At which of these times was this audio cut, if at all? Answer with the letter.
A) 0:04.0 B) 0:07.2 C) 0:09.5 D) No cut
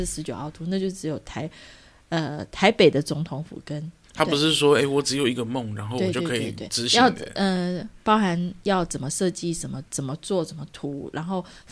A